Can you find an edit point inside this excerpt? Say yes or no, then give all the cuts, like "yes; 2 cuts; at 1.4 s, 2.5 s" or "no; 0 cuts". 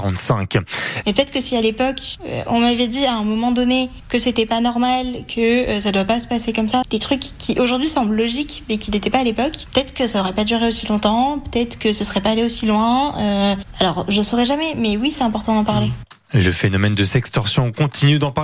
yes; 2 cuts; at 1.0 s, 6.8 s